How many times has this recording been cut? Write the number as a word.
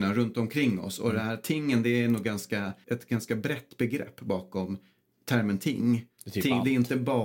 one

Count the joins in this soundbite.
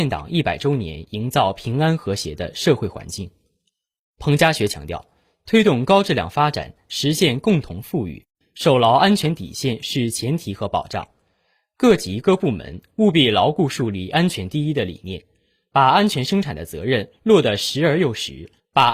zero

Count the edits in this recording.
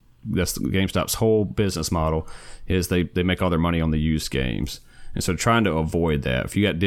zero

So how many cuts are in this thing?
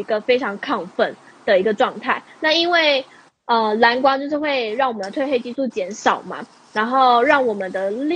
zero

